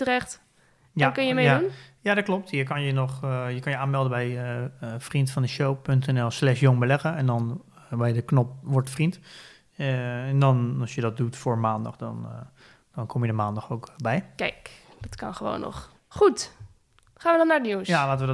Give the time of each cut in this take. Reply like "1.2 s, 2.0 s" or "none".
none